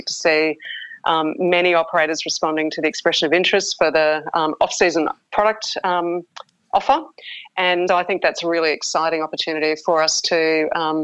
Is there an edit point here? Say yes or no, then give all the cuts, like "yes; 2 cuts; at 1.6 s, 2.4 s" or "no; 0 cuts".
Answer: yes; 1 cut; at 7.9 s